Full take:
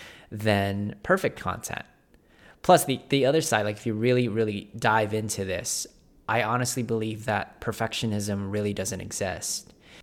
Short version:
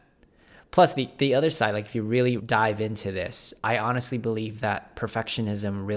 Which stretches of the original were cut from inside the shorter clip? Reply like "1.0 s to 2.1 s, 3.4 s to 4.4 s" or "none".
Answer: 4.3 s to 4.7 s, 5.9 s to 6.2 s